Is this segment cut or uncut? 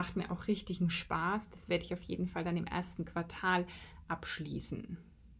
uncut